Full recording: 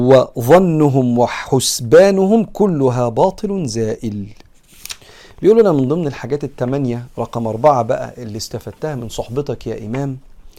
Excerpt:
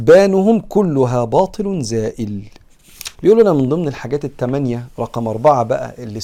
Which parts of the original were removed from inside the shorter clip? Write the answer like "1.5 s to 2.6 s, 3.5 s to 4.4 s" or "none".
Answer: 5.0 s to 5.3 s